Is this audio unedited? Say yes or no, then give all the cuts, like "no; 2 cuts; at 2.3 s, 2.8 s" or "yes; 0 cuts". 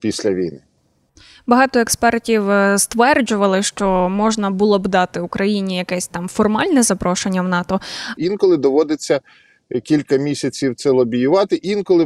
no; 1 cut; at 8.2 s